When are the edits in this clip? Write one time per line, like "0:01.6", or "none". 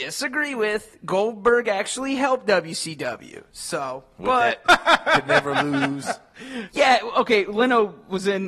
0:04.7
0:06.7